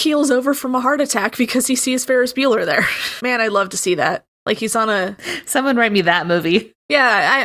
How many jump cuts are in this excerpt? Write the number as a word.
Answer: one